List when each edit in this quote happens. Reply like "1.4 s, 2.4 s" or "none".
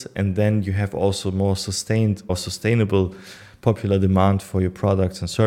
2.3 s